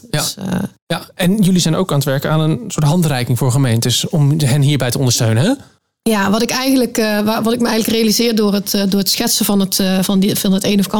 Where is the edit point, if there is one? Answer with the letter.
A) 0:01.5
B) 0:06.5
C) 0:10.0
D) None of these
C